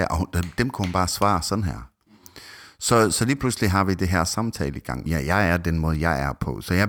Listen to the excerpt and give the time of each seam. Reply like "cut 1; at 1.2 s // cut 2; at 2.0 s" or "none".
cut 1; at 3.1 s // cut 2; at 5.1 s